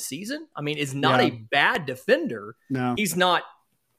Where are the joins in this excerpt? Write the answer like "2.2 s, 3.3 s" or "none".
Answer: none